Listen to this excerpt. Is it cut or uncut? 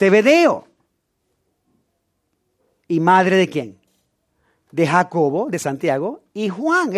uncut